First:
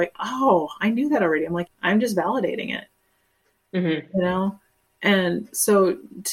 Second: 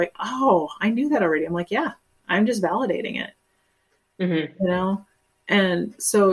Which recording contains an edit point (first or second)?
first